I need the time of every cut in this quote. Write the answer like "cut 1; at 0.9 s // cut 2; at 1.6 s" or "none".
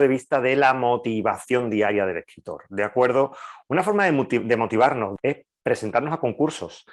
cut 1; at 5.2 s